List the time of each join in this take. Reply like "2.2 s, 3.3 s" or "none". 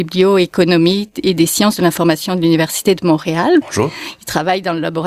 3.6 s